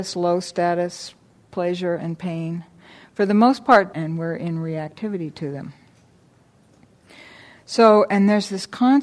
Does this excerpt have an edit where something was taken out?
yes; 1 cut; at 3.9 s

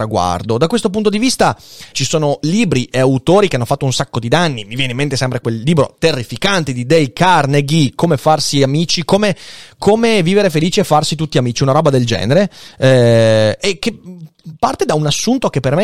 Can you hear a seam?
yes; 1 cut; at 1.9 s

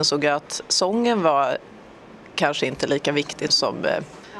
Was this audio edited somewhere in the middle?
yes; 2 cuts; at 2.3 s, 3.5 s

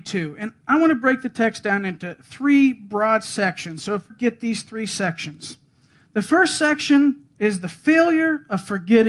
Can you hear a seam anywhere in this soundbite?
yes; 1 cut; at 4.1 s

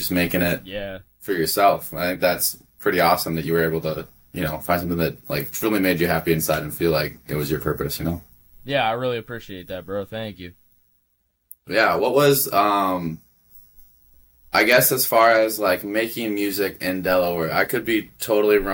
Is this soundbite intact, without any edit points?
yes; 0 cuts

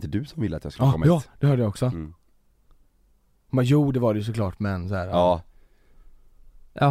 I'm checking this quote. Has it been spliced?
no; 0 cuts

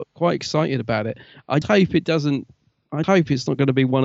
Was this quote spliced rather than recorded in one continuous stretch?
yes; 2 cuts; at 1.6 s, 3.0 s

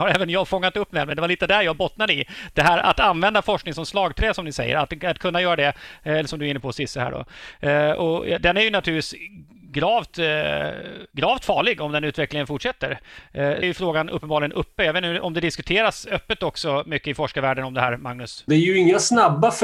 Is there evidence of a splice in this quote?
yes; 2 cuts; at 13.6 s, 18.5 s

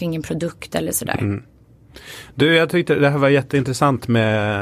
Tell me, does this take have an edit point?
no; 0 cuts

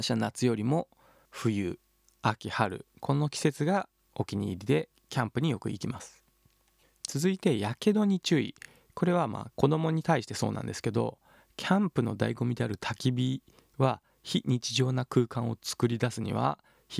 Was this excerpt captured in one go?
yes; 0 cuts

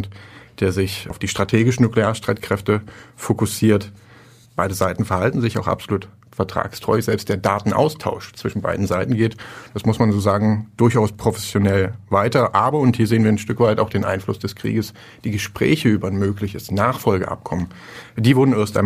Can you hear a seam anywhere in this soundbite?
yes; 1 cut; at 4.4 s

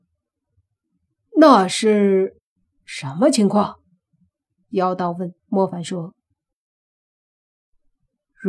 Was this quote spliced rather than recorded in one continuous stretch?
yes; 1 cut; at 5.4 s

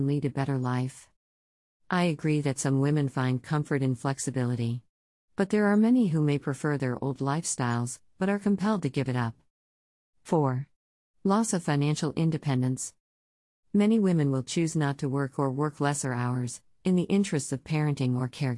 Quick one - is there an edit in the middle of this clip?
no; 0 cuts

